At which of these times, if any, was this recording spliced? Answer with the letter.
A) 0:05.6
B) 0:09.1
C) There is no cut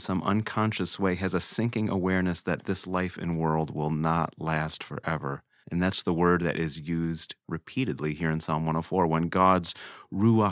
A